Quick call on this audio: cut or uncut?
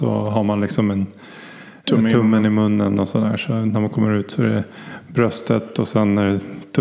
uncut